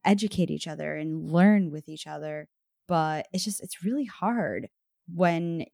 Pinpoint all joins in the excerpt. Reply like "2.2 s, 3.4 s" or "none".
none